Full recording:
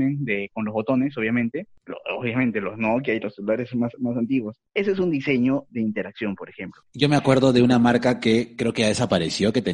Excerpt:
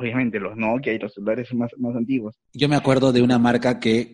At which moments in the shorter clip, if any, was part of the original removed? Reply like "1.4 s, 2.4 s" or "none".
2.5 s